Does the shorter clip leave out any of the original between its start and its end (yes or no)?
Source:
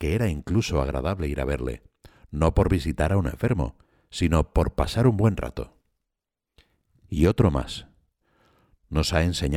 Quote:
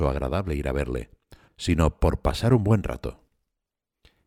yes